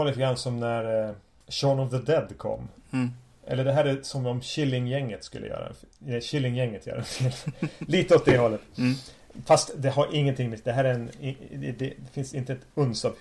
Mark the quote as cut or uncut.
uncut